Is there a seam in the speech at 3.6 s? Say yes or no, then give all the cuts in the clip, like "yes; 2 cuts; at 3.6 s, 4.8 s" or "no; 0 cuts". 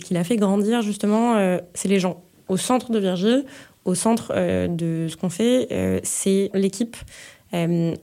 no; 1 cut; at 6.5 s